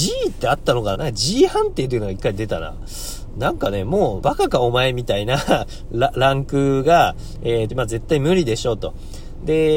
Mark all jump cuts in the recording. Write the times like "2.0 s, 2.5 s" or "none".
0.9 s, 4.2 s, 7.7 s